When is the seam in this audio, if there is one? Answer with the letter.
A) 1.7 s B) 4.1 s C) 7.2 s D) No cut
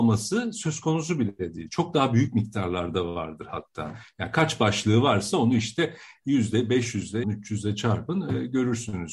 C